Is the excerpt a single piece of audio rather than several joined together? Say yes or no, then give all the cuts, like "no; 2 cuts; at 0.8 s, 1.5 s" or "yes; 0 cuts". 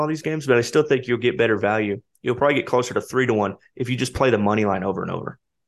yes; 0 cuts